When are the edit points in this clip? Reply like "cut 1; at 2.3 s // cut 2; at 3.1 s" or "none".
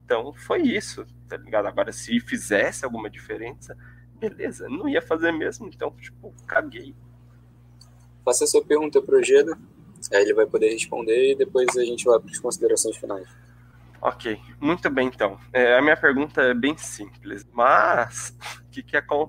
cut 1; at 17.4 s